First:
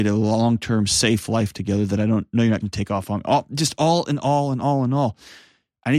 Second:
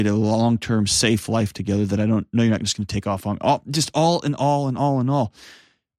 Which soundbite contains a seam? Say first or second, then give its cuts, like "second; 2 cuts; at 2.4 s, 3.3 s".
first; 1 cut; at 2.6 s